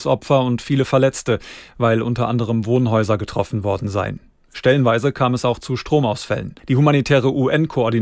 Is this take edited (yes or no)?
yes